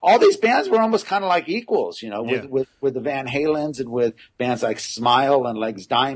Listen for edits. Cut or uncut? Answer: uncut